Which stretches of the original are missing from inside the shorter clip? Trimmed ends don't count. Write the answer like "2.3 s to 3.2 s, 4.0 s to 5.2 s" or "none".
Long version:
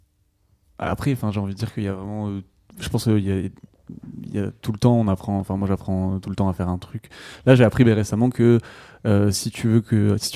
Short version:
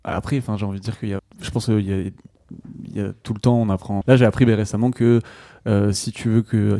1.9 s to 2.6 s, 5.4 s to 7.4 s